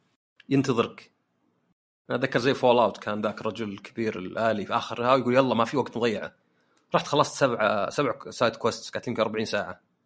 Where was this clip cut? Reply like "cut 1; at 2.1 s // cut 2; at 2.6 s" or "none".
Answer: none